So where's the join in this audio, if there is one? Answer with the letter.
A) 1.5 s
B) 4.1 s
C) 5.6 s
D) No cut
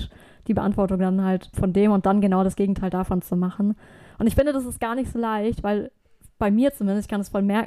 A